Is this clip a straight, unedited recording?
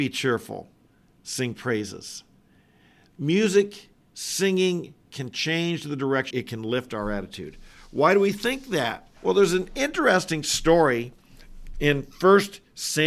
no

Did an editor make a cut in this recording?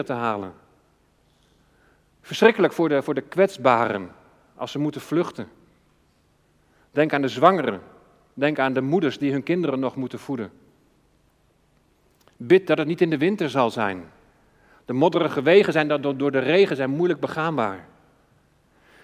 no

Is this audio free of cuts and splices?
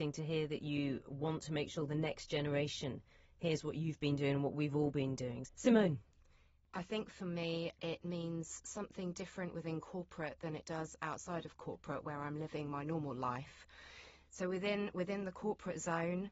no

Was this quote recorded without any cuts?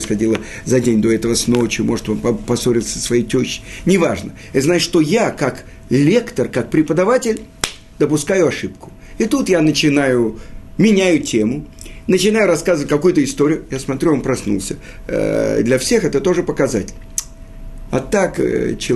no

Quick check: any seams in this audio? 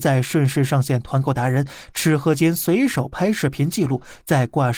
no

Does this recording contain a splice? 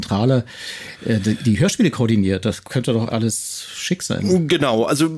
yes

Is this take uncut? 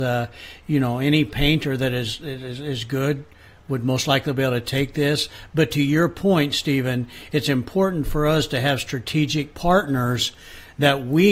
yes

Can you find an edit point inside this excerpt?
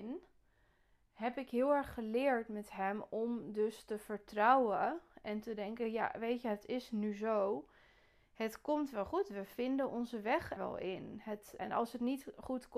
yes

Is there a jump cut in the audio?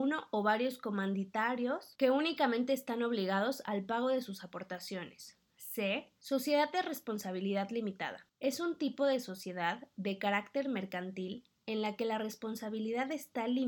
no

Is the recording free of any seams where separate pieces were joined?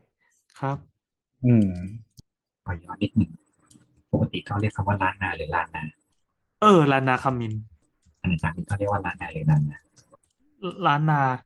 yes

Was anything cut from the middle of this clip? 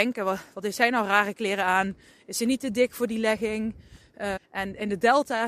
yes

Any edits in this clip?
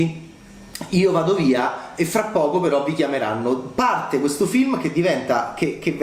no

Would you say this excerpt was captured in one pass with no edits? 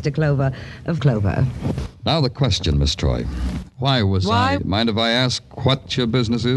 no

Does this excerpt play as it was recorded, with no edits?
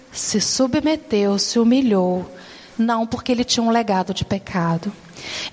no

